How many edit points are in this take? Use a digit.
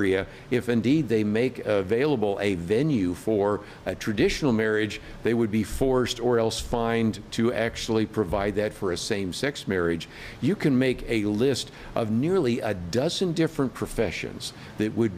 0